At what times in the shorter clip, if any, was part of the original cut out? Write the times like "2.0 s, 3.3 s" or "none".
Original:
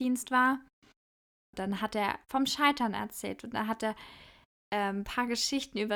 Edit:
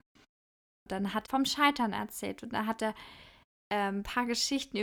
1.2 s